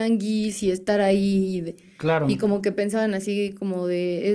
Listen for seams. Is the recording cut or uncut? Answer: uncut